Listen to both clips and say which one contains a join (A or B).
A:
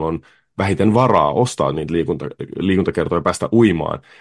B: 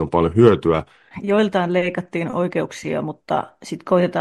B